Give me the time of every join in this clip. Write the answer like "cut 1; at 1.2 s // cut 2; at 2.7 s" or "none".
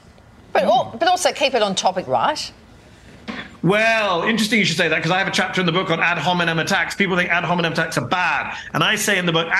cut 1; at 2.1 s